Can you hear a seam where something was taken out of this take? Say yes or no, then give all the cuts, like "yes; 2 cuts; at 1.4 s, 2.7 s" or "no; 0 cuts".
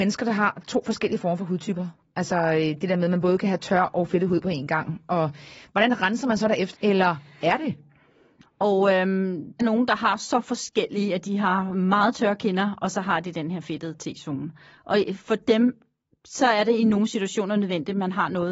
yes; 3 cuts; at 6.7 s, 8.4 s, 9.6 s